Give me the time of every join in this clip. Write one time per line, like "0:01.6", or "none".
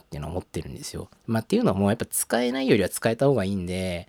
0:01.2